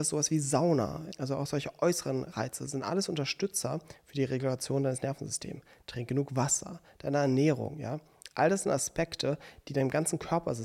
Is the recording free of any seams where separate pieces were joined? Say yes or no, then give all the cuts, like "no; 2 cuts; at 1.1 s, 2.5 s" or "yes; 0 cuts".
yes; 0 cuts